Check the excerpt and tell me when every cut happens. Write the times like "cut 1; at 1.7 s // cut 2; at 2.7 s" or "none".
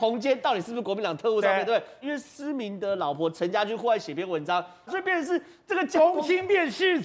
cut 1; at 2.0 s // cut 2; at 4.9 s